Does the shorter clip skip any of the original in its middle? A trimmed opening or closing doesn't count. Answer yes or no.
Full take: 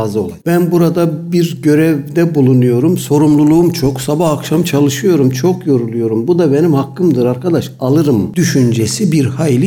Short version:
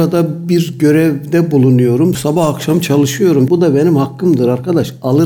yes